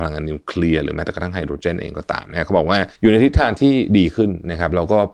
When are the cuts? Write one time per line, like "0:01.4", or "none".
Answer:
0:03.0